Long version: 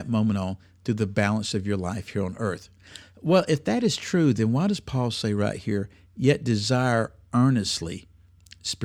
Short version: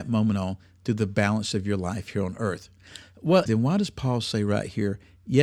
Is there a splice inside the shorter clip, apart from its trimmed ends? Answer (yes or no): yes